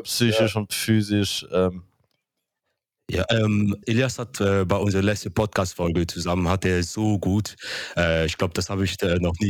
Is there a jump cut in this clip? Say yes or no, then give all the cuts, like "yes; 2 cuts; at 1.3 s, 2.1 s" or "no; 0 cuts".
yes; 1 cut; at 3.8 s